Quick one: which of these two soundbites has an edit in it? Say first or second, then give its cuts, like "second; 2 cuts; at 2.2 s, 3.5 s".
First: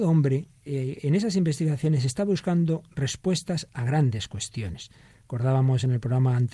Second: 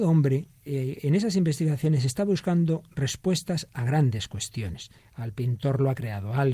second; 1 cut; at 5.0 s